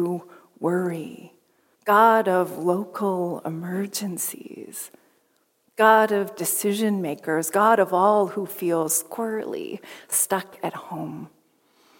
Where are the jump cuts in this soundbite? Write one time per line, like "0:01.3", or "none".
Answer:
0:01.8